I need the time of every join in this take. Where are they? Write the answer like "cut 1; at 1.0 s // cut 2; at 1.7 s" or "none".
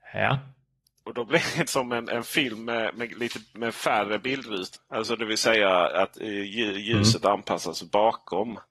cut 1; at 1.7 s // cut 2; at 3.5 s // cut 3; at 4.7 s